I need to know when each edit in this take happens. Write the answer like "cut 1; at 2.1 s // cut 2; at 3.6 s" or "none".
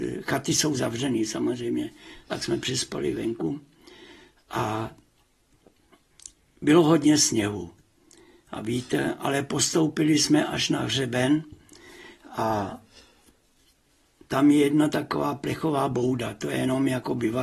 none

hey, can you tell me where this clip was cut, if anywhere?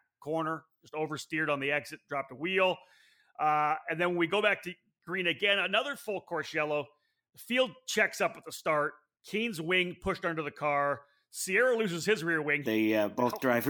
cut 1; at 9.2 s // cut 2; at 12.6 s

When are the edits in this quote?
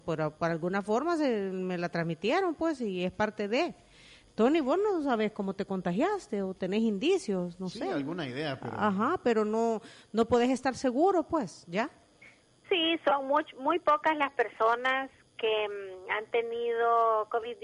none

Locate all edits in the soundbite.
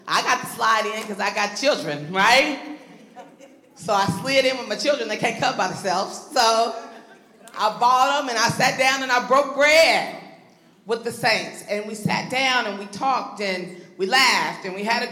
none

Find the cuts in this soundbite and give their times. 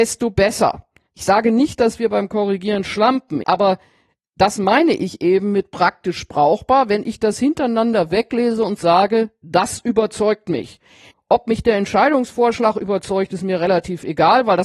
cut 1; at 3.4 s // cut 2; at 11.1 s

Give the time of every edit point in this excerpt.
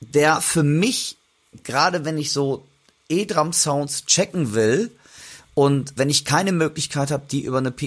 cut 1; at 6.0 s

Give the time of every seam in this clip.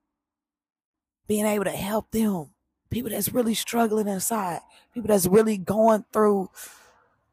none

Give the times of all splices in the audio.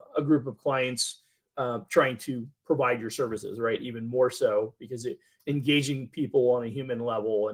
cut 1; at 3.8 s // cut 2; at 5.4 s

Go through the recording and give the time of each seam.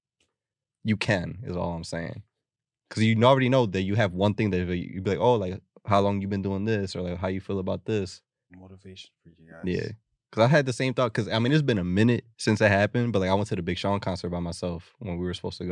cut 1; at 8.5 s // cut 2; at 12.3 s

